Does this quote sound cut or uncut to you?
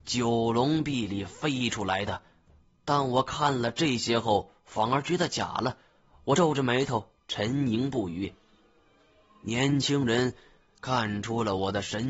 uncut